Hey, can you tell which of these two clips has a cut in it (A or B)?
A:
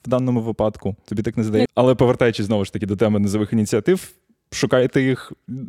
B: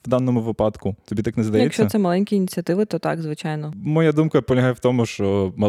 A